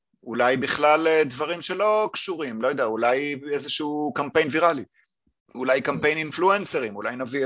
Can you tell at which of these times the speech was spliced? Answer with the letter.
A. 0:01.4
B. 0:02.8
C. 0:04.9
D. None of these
D